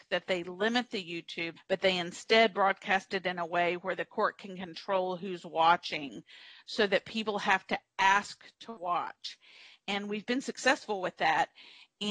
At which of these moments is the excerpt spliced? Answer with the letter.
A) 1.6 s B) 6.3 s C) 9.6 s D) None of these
A